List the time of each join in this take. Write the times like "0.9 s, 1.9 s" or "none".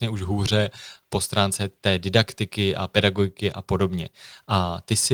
1.0 s